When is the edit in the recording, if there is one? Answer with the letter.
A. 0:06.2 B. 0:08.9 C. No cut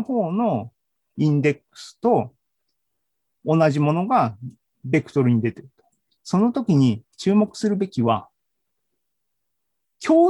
A